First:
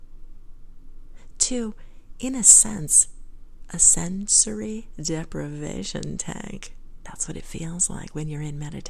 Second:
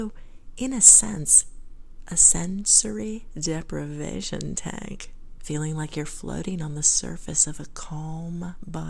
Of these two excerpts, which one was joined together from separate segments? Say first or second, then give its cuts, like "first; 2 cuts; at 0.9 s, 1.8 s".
second; 1 cut; at 5.4 s